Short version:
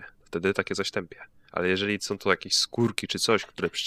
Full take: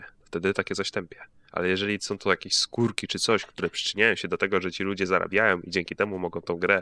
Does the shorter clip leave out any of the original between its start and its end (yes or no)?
no